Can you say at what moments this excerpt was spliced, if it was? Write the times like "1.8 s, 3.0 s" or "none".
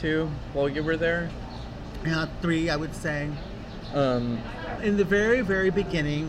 4.8 s